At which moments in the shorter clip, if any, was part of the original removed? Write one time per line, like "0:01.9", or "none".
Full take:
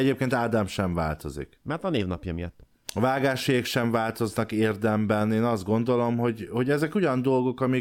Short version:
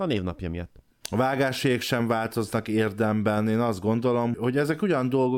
0:04.3